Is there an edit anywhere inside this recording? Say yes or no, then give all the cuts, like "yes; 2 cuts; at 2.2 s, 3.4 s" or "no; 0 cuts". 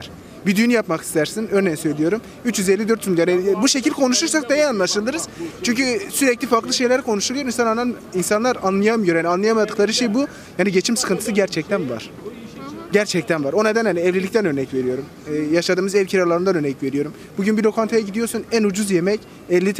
no; 0 cuts